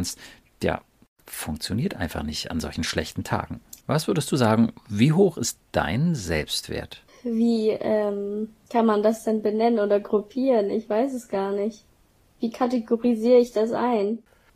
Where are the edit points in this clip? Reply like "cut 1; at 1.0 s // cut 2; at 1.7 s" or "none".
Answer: cut 1; at 3.8 s